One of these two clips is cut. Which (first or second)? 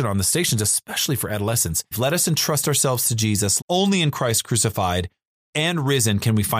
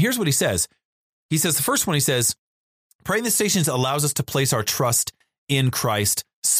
first